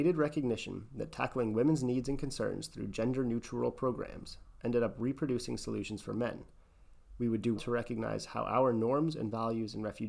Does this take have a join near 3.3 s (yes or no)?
no